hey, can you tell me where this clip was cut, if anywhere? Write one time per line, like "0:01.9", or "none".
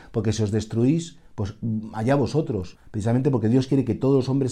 0:02.7